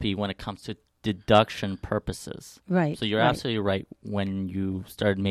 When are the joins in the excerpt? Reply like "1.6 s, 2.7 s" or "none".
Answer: none